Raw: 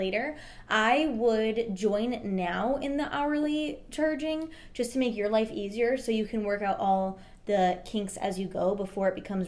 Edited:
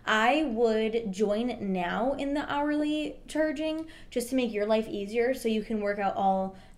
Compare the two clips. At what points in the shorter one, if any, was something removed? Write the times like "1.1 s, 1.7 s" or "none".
none